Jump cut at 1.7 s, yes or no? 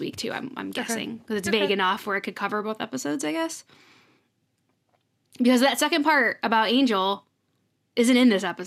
no